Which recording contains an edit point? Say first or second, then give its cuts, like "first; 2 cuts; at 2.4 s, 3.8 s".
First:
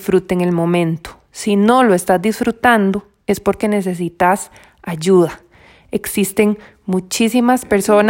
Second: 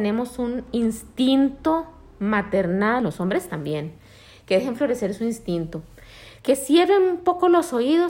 second; 2 cuts; at 3.0 s, 6.4 s